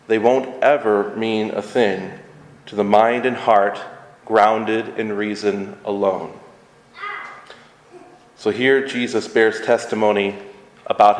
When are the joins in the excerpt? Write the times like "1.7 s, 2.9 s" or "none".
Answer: none